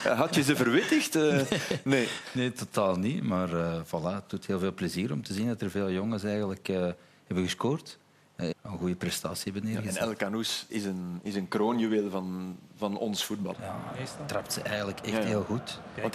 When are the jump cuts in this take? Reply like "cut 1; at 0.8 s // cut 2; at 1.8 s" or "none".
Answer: cut 1; at 8.5 s // cut 2; at 10.7 s // cut 3; at 13.5 s